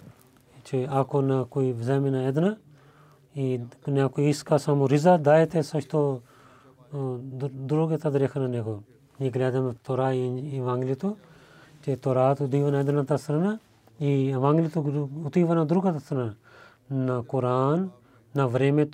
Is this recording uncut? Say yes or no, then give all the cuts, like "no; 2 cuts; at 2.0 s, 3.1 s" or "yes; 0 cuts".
no; 1 cut; at 9.8 s